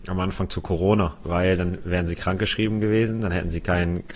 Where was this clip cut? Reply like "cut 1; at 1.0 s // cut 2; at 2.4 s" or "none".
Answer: cut 1; at 1.2 s